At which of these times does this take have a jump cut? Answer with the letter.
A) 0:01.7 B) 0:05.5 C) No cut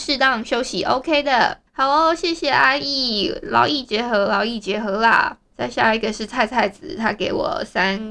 A